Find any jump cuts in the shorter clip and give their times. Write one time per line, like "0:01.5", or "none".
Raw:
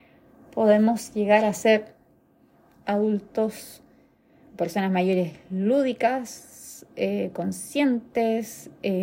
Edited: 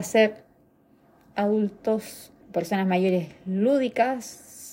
0:02.4